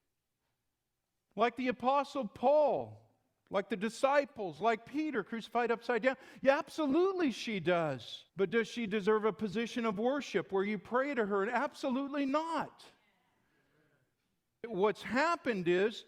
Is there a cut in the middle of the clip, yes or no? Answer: yes